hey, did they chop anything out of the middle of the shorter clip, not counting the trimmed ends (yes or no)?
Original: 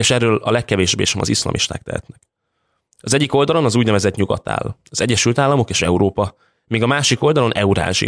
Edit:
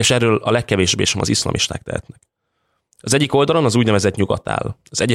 no